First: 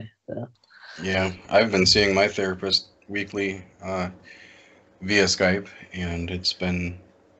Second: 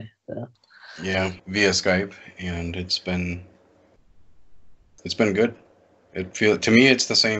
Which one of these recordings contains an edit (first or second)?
second